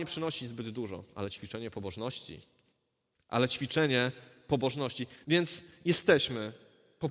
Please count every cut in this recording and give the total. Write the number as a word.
one